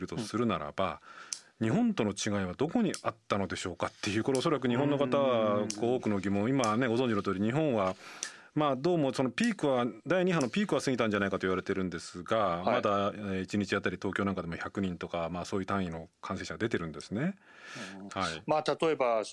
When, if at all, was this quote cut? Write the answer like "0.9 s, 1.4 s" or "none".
18.1 s